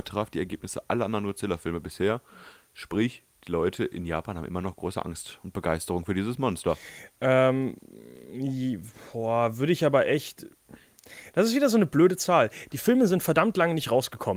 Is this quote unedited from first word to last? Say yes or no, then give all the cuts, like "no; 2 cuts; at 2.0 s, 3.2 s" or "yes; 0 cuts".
yes; 0 cuts